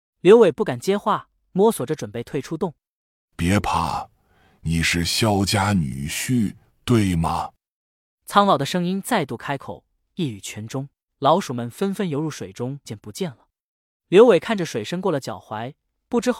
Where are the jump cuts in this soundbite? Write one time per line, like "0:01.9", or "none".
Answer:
0:06.7
0:11.1
0:12.9